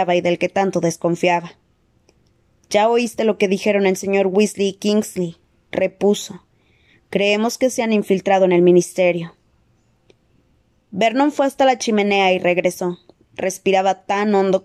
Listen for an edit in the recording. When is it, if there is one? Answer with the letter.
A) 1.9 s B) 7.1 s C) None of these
C